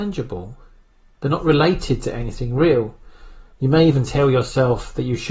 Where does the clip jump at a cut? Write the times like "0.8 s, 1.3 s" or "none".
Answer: 3.5 s